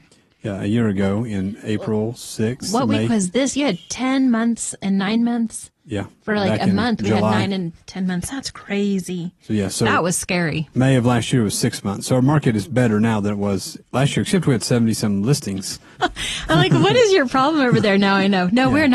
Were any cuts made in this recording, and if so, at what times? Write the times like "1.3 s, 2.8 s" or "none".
13.8 s, 16.0 s